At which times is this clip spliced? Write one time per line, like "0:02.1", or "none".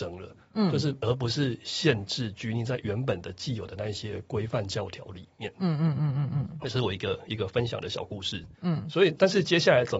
0:08.5